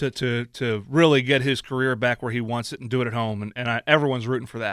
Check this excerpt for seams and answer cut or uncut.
uncut